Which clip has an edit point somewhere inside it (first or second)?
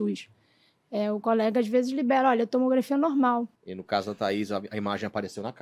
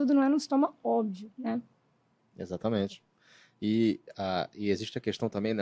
first